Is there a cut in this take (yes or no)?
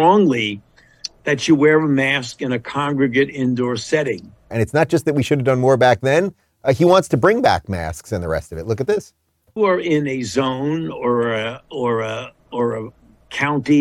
yes